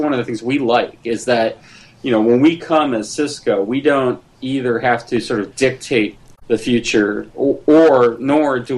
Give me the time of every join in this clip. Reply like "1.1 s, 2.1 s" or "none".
none

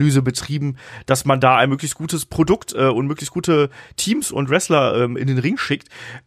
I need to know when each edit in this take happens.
none

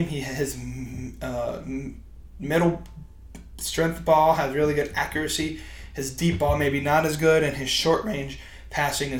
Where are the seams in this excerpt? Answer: none

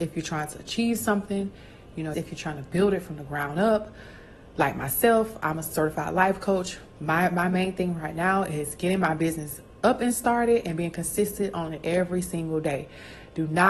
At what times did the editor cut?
2.1 s

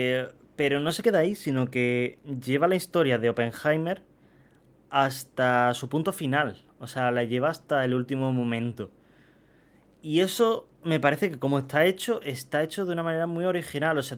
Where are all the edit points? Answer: none

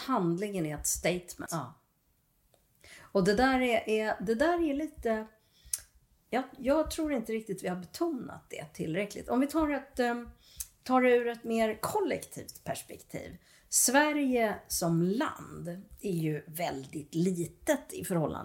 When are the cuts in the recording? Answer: 1.5 s

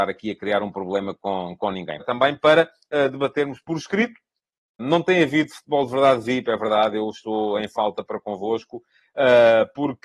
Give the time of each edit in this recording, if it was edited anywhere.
2.0 s, 4.8 s

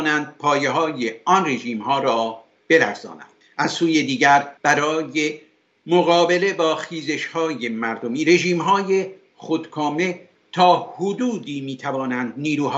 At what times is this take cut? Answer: 4.6 s

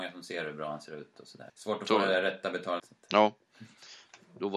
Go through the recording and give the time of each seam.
1.5 s, 2.8 s

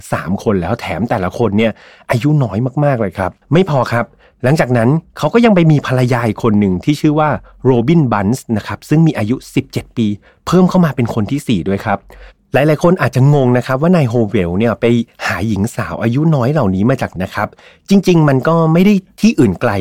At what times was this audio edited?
3.4 s, 17.2 s

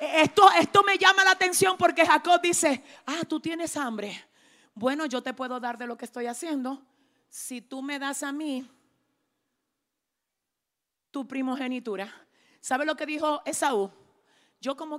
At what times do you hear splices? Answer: none

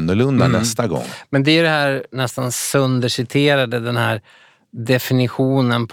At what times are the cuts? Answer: none

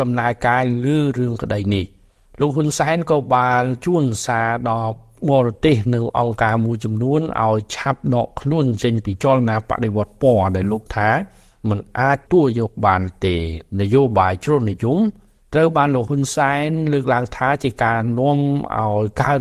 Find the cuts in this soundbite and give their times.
12.3 s

